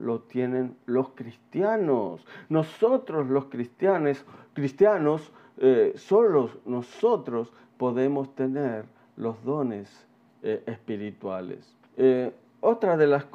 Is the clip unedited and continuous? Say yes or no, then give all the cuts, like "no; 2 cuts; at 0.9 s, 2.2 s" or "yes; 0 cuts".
no; 1 cut; at 11.8 s